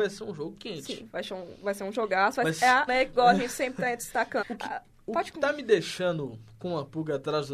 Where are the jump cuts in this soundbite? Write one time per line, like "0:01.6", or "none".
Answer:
0:02.9
0:04.4